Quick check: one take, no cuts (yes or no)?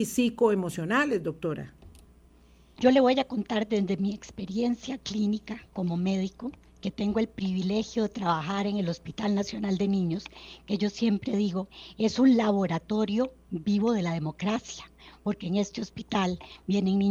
no